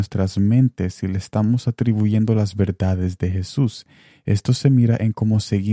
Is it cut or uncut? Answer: uncut